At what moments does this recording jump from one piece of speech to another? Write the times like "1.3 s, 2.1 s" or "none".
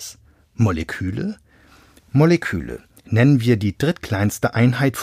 none